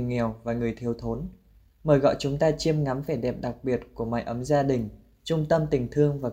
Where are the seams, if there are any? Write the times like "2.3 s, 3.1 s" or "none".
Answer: none